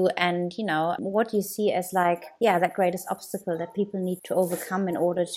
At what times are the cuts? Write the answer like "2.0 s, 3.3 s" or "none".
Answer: 1.0 s, 4.2 s